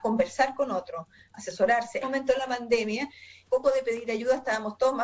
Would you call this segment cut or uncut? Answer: cut